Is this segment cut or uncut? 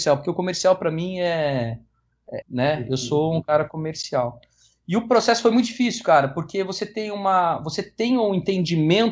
cut